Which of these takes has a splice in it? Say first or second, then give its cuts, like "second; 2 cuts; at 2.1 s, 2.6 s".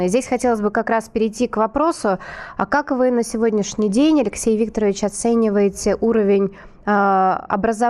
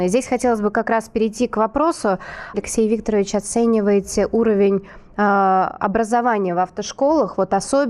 second; 1 cut; at 2.5 s